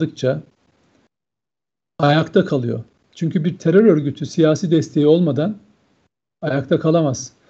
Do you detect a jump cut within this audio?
no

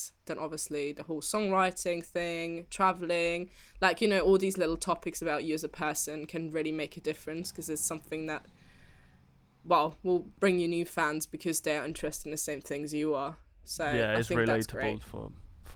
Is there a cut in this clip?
no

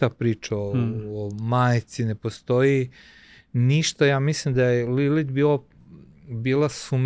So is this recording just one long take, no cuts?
yes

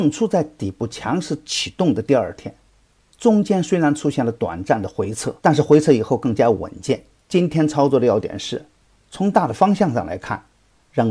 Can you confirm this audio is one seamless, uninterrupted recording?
no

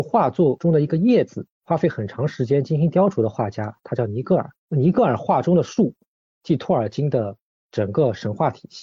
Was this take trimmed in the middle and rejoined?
yes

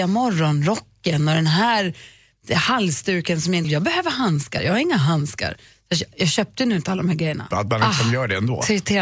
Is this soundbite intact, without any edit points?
no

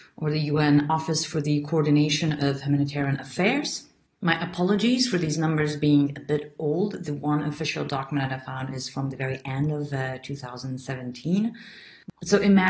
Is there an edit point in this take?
no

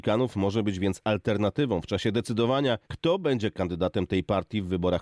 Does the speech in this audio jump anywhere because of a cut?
yes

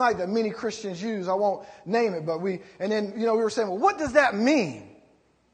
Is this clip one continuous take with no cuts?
yes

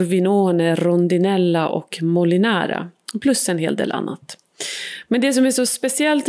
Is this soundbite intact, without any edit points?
yes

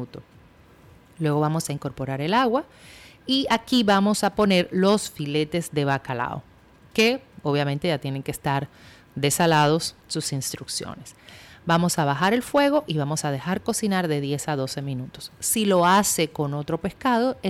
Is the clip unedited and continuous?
no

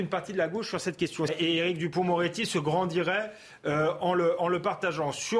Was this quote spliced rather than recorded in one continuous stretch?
yes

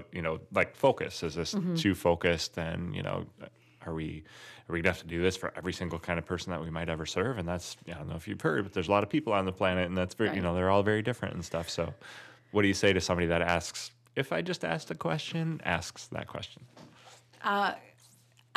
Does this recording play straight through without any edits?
yes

